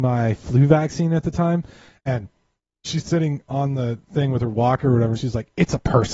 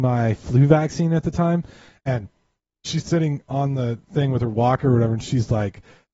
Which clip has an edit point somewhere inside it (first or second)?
first